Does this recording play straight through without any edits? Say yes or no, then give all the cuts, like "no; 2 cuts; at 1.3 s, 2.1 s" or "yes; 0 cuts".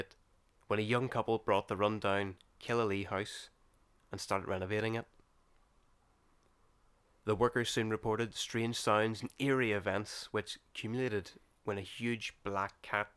yes; 0 cuts